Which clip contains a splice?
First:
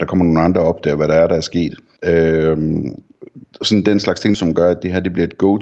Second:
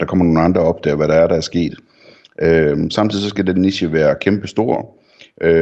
first; 2 cuts; at 2.0 s, 4.3 s

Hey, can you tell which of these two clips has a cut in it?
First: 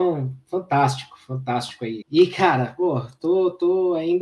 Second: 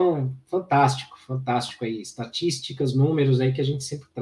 first; 1 cut; at 2.0 s

